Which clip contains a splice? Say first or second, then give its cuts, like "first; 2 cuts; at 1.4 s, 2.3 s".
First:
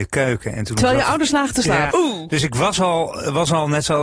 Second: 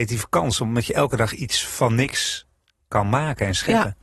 first; 1 cut; at 1.9 s